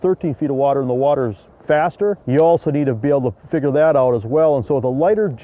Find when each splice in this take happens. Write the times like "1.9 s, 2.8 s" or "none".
2.2 s